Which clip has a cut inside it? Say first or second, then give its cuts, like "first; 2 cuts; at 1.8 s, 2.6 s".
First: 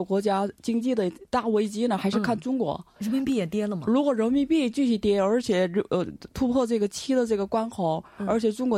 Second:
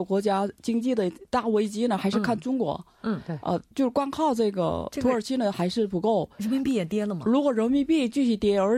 first; 1 cut; at 3.0 s